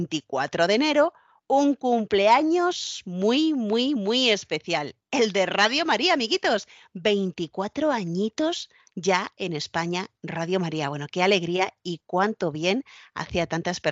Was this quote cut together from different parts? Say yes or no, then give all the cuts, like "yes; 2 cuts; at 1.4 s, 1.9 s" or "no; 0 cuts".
no; 0 cuts